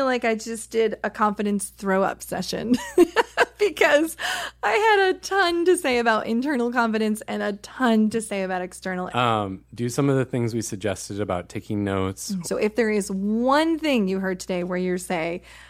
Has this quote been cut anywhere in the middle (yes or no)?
yes